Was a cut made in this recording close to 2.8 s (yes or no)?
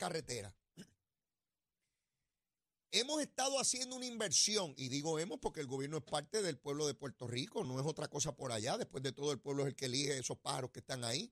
no